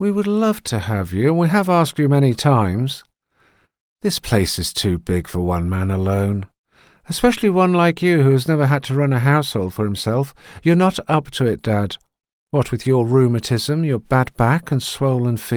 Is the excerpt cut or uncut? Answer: uncut